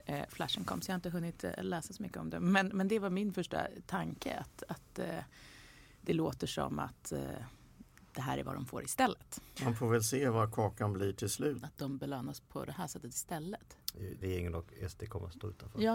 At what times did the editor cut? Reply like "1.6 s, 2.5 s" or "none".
9.6 s, 11.6 s, 14.2 s